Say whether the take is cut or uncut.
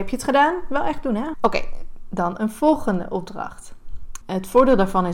cut